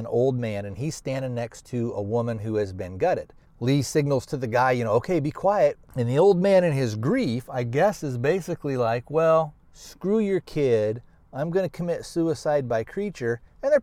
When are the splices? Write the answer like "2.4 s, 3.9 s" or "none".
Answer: 3.4 s, 5.8 s, 9.7 s